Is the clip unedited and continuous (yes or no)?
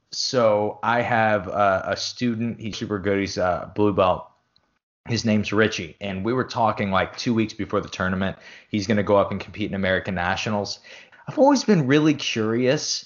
no